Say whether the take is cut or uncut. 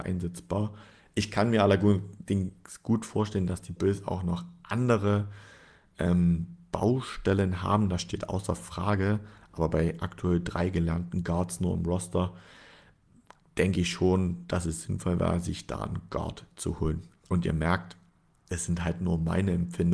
uncut